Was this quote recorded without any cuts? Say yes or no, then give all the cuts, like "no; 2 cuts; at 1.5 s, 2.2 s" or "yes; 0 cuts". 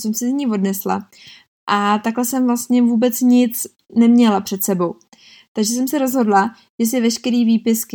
yes; 0 cuts